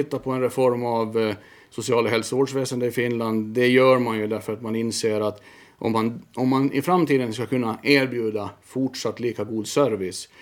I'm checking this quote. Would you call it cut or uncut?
uncut